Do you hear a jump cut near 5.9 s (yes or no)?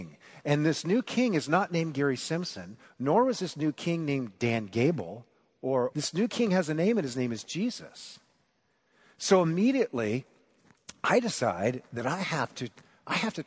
yes